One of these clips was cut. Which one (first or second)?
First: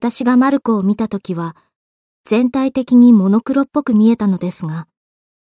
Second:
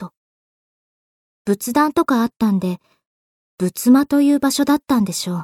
second